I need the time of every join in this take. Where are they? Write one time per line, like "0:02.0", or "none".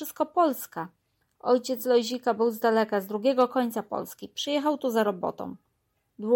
none